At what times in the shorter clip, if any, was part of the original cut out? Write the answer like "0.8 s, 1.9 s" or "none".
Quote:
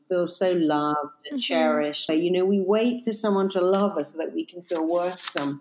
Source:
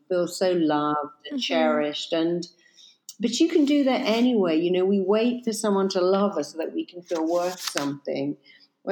2.1 s

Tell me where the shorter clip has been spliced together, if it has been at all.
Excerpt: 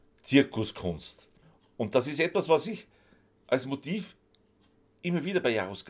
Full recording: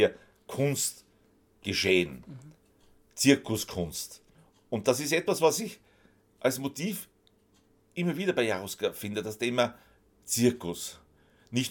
none

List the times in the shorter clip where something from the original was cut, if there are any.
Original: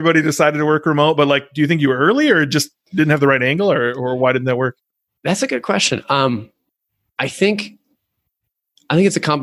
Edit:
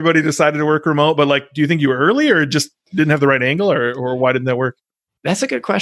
none

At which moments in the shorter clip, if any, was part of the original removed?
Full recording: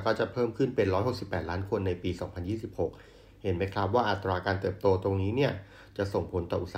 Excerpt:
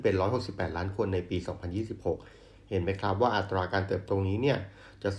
4.1 s

